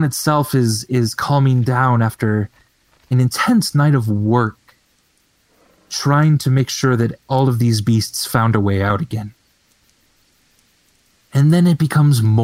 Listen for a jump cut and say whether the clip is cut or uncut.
uncut